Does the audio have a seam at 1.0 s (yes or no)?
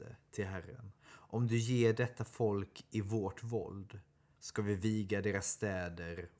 yes